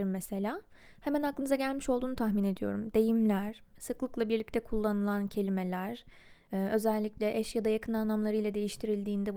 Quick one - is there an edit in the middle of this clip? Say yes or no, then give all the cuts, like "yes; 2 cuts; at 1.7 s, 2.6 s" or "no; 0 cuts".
no; 0 cuts